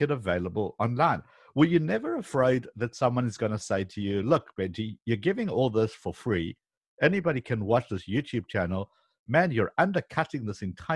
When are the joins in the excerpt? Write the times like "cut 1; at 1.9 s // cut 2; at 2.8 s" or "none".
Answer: none